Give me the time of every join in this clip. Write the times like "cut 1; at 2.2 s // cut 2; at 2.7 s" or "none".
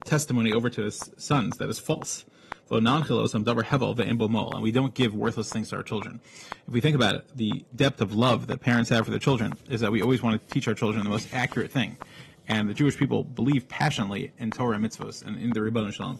none